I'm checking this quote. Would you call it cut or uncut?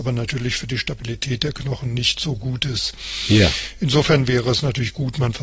uncut